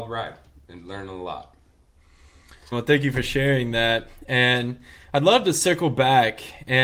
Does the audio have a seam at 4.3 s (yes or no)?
no